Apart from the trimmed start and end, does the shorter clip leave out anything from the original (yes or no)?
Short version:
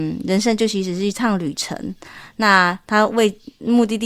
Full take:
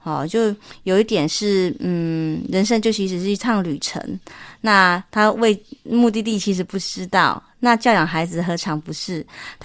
no